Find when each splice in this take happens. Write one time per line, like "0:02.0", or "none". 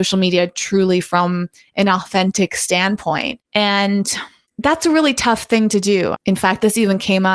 0:06.1